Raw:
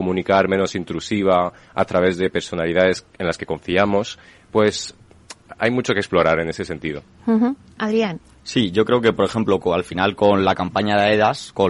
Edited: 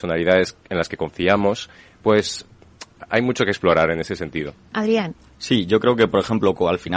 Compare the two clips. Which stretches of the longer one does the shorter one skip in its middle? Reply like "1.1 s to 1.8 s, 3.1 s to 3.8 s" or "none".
7.2 s to 7.7 s